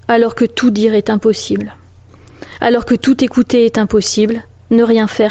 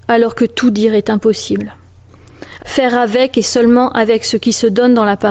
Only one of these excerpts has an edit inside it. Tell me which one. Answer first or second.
second